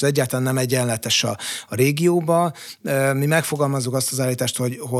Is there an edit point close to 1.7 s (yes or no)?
no